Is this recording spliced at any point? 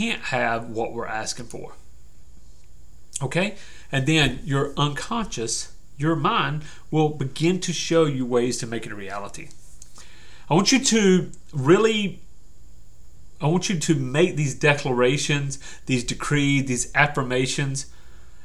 no; 0 cuts

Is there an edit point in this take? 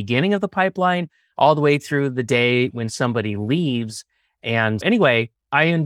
yes; 2 cuts; at 2.7 s, 4.8 s

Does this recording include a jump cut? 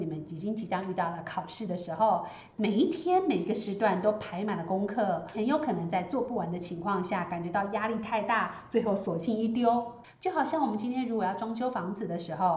yes; 2 cuts; at 2.5 s, 10.0 s

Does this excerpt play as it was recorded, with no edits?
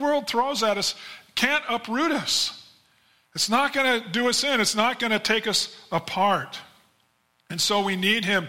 yes; 0 cuts

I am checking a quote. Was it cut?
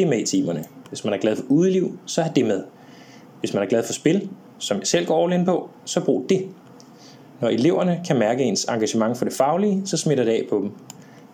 no; 0 cuts

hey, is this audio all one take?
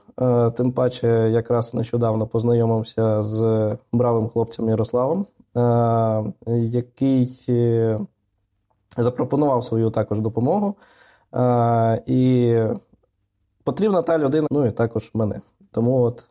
no; 1 cut; at 14.5 s

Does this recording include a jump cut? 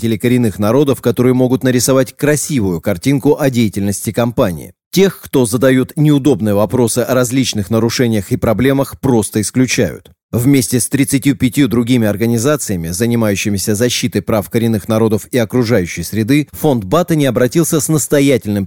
no; 0 cuts

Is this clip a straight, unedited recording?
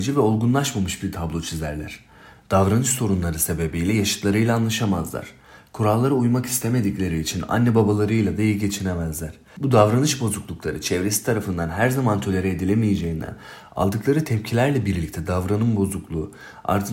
yes; 0 cuts

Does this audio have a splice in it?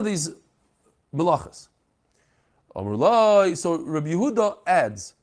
no; 0 cuts

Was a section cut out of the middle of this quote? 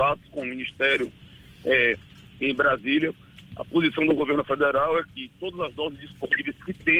no; 0 cuts

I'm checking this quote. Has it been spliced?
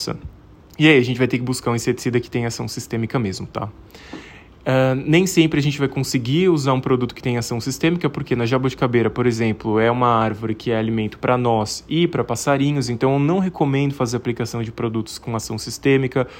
no; 0 cuts

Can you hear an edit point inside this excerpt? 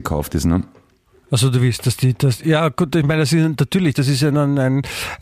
no; 0 cuts

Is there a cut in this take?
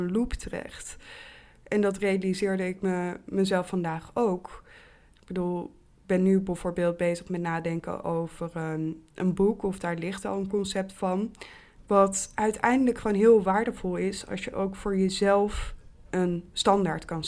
yes; 1 cut; at 11.8 s

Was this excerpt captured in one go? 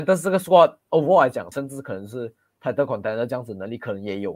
no; 1 cut; at 1.5 s

